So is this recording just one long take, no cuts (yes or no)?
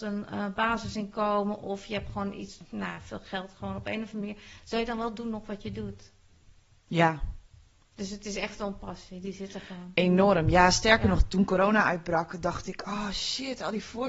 yes